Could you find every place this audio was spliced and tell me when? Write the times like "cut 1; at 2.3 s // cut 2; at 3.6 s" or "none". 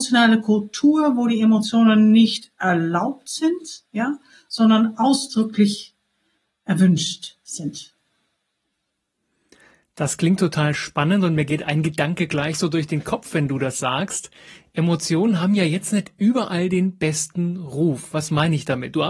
none